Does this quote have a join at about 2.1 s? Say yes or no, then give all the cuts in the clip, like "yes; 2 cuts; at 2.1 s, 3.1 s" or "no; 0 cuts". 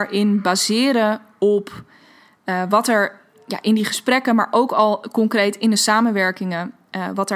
no; 0 cuts